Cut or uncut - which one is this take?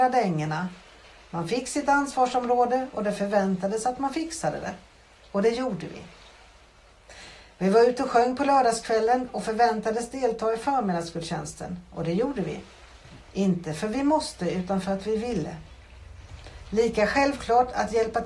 cut